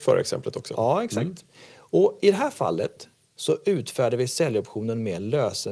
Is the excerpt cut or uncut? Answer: uncut